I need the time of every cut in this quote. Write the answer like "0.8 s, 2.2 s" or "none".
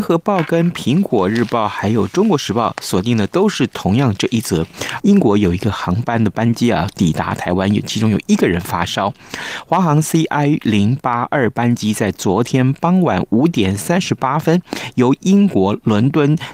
5.0 s